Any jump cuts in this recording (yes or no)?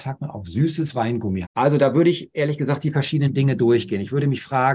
yes